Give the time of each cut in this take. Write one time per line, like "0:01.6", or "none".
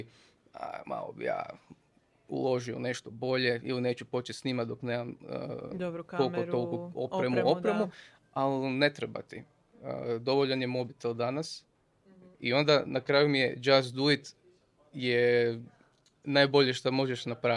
0:12.3